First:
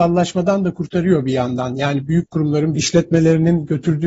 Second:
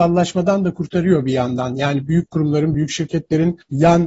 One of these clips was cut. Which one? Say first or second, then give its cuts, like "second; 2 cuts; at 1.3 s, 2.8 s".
first; 1 cut; at 2.7 s